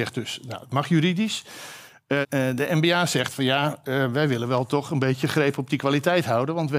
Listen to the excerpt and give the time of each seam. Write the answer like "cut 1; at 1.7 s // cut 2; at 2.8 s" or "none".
cut 1; at 2.2 s

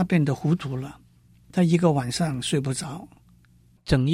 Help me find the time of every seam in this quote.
cut 1; at 1.3 s

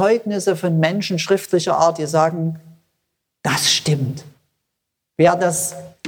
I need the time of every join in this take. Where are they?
cut 1; at 5.2 s

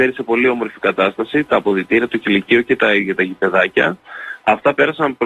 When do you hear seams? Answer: none

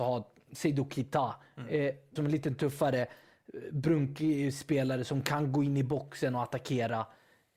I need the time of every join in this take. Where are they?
cut 1; at 2.2 s

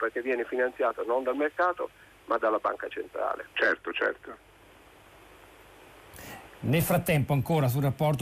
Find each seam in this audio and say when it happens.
none

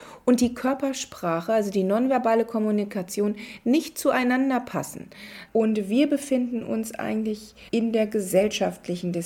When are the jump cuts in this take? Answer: cut 1; at 5.5 s // cut 2; at 7.7 s

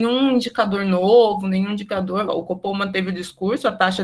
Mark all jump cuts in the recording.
cut 1; at 2.3 s

